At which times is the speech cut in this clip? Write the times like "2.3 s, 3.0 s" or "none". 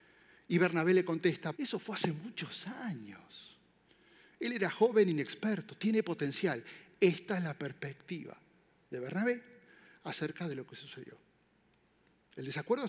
1.5 s